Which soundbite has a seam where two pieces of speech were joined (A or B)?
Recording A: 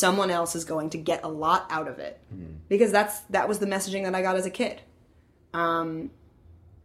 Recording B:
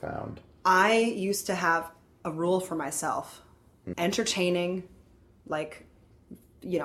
B